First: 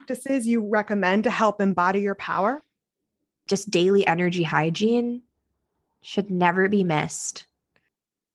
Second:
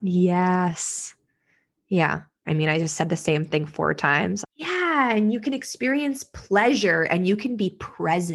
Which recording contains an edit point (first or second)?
second